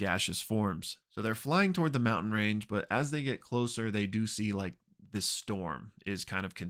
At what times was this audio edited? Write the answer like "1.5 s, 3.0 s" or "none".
1.0 s